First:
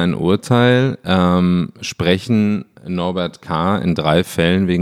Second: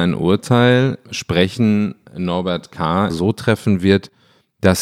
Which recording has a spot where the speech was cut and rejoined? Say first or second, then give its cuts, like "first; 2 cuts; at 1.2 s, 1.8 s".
second; 2 cuts; at 1.0 s, 3.1 s